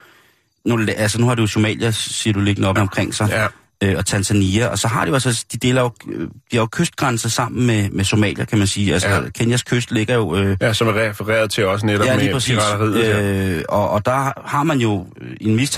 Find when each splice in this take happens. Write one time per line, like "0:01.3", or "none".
0:02.8